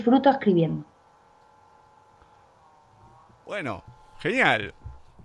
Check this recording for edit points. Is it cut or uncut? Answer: uncut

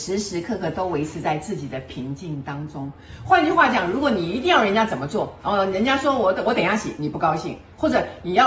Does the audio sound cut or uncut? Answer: cut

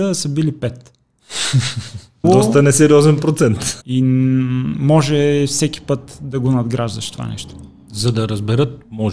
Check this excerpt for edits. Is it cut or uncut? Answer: cut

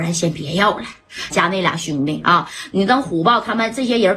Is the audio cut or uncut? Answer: cut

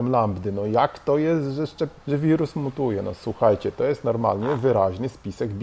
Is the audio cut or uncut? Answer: cut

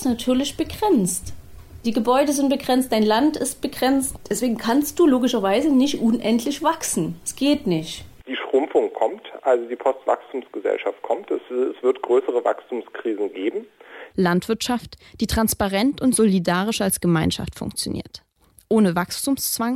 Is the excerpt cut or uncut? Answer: cut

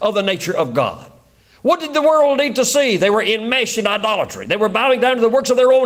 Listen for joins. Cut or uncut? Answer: uncut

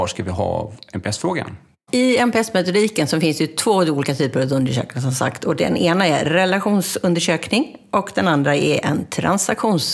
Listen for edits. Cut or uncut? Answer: uncut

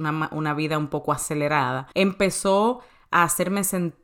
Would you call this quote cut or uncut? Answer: cut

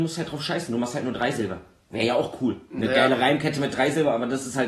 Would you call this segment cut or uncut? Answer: uncut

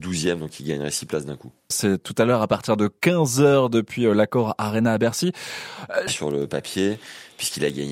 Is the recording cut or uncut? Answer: cut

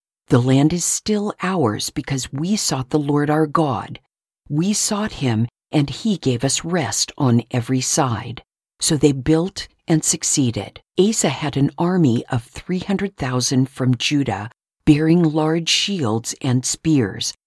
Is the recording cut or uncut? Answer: cut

